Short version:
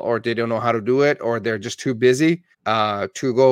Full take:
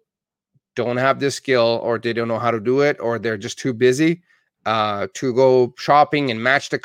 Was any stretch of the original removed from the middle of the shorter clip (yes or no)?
yes